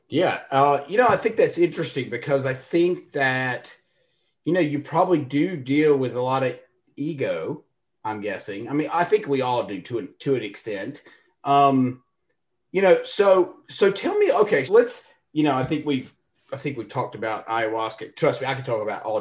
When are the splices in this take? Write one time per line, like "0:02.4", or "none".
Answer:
0:14.7